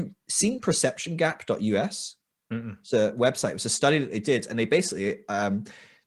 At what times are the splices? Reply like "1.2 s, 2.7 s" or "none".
none